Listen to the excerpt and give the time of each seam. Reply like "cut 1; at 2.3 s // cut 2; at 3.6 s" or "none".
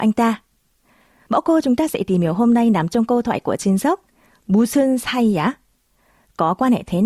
none